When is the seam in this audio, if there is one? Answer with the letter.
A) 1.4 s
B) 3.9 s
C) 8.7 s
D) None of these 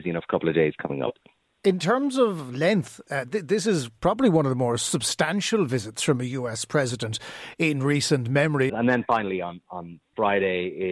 C